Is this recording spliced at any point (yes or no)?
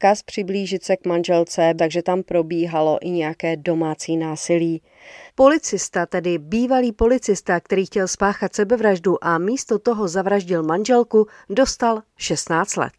yes